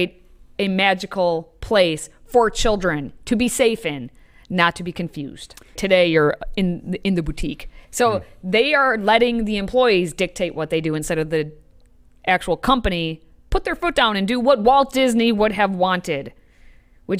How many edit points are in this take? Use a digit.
2